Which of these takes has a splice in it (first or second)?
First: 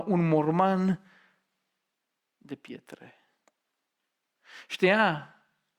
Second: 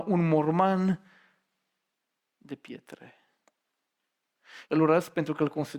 second